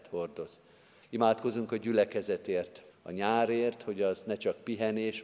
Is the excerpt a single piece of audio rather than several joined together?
no; 2 cuts; at 1.0 s, 2.9 s

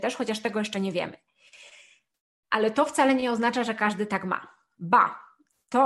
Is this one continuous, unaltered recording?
yes; 0 cuts

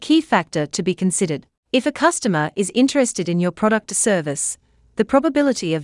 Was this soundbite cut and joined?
yes; 1 cut; at 1.6 s

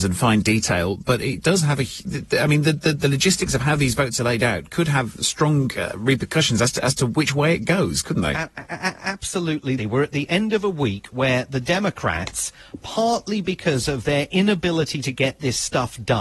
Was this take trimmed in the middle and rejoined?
yes; 1 cut; at 9.8 s

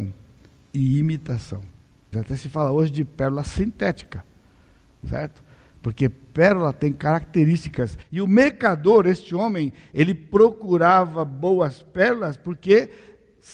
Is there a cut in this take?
yes; 1 cut; at 2.1 s

